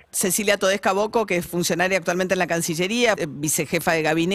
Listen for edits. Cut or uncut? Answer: cut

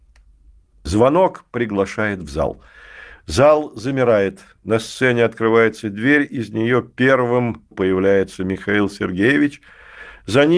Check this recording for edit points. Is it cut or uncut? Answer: cut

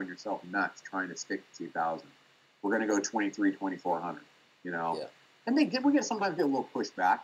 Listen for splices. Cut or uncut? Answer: uncut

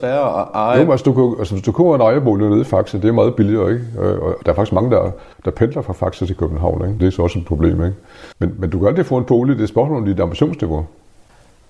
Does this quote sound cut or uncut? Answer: cut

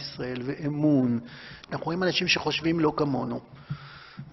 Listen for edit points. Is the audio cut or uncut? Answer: cut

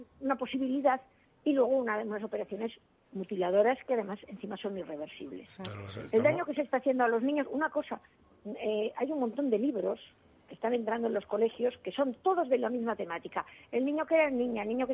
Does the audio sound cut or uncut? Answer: uncut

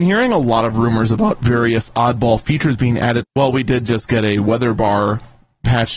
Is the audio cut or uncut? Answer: cut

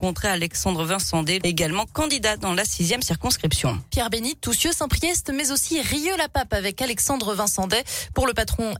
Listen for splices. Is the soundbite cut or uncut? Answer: cut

